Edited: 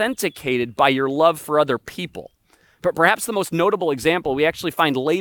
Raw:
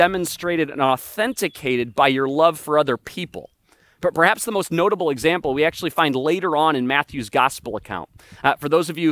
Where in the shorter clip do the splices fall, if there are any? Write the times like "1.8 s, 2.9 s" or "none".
none